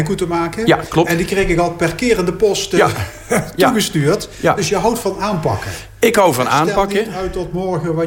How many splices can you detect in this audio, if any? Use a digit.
0